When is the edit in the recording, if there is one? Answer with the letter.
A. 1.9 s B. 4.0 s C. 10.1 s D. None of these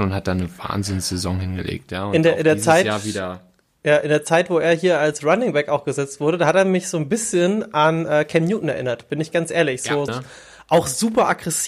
C